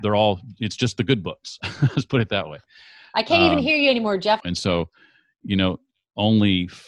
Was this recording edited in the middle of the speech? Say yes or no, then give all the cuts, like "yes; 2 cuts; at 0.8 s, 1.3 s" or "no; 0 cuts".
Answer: yes; 1 cut; at 4.4 s